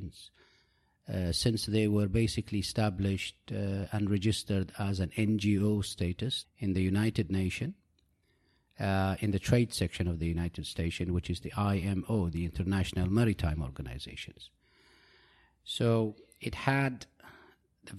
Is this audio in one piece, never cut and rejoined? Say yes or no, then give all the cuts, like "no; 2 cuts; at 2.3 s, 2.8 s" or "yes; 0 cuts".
no; 1 cut; at 6.4 s